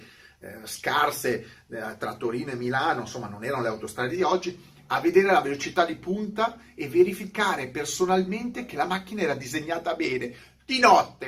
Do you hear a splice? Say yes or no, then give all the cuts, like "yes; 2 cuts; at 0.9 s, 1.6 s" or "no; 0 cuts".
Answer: no; 0 cuts